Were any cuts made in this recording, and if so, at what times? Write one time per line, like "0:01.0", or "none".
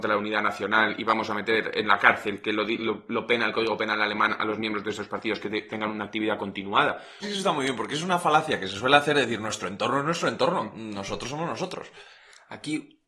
0:07.2